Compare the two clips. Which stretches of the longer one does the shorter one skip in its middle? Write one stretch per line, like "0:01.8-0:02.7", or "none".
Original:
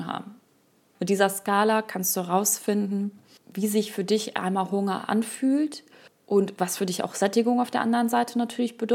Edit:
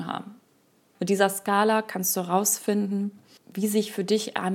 none